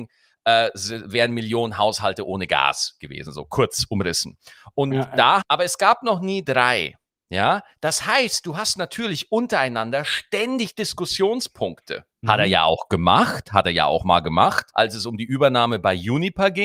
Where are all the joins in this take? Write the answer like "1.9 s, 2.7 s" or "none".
5.4 s, 12.2 s, 14.7 s